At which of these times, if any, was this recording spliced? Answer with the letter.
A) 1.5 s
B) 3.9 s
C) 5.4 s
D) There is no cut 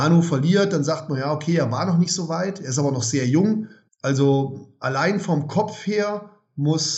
B